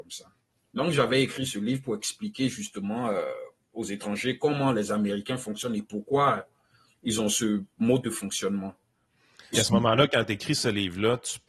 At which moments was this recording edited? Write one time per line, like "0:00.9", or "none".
0:09.5